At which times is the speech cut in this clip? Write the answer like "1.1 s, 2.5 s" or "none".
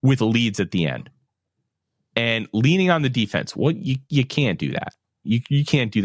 none